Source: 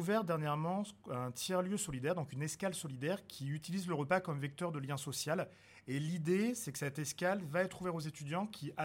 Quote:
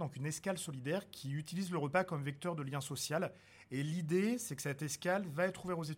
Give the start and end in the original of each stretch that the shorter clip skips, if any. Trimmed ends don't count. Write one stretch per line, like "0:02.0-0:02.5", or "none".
none